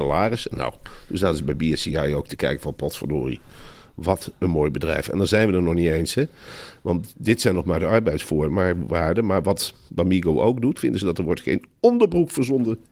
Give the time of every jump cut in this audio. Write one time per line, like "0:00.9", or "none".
0:10.7